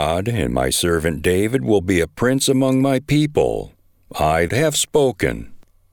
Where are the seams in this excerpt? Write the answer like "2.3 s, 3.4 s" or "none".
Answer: 4.5 s

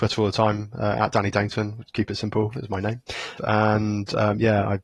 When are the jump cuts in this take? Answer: 3.4 s

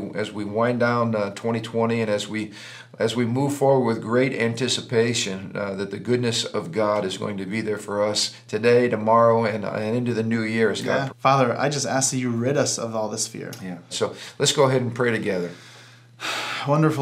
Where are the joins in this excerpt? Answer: 11.1 s, 13.9 s

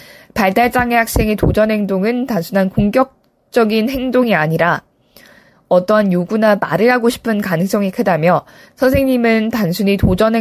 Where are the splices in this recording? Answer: none

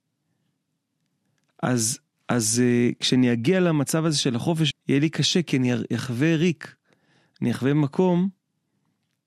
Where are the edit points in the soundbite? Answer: 4.7 s

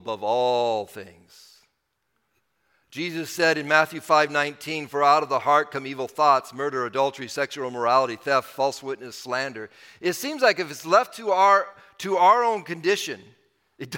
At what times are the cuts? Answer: none

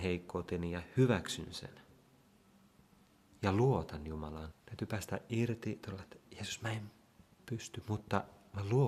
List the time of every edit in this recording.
4.5 s

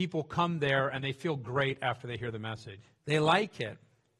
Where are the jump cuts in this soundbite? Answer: 3.0 s

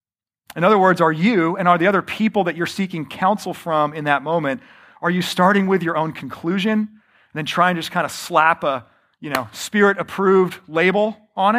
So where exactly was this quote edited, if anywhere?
none

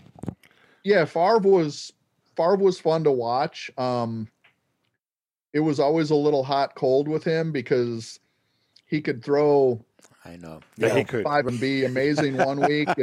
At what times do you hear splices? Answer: 11.5 s

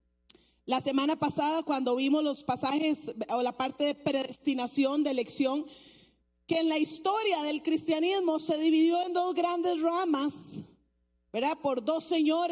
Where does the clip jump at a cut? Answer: none

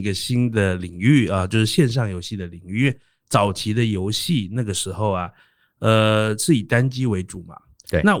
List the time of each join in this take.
none

